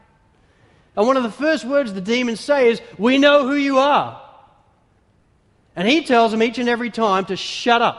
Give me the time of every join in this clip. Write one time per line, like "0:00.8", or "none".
0:00.9